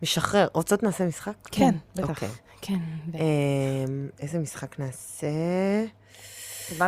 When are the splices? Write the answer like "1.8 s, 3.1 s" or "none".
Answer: none